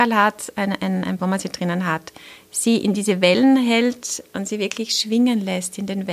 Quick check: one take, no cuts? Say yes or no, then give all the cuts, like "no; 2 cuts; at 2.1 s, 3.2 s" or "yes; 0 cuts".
no; 1 cut; at 1.2 s